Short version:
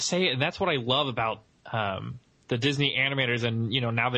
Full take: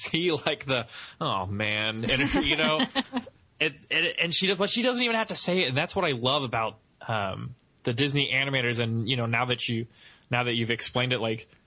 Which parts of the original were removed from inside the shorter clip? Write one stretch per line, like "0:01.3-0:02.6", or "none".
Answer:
none